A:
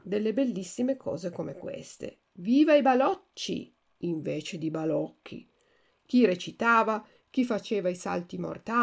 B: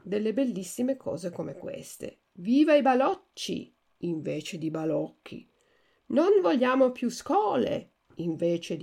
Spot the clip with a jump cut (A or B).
A